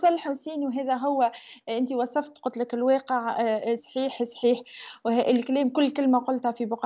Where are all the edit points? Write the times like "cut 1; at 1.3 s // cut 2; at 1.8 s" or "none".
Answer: cut 1; at 3.8 s